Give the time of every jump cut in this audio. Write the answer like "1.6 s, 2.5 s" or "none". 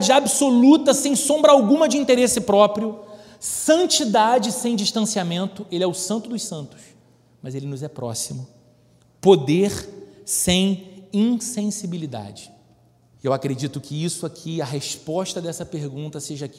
13.1 s